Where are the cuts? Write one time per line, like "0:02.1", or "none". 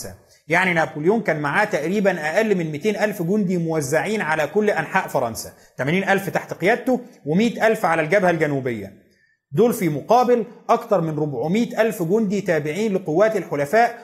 none